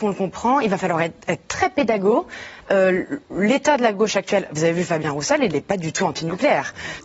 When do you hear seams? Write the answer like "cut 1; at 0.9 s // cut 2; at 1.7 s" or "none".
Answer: none